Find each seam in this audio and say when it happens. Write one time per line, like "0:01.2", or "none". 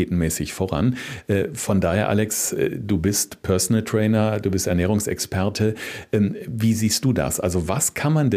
none